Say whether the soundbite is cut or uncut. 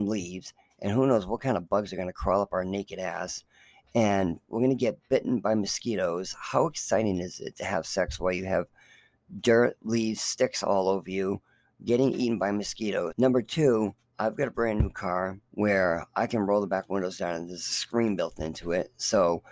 cut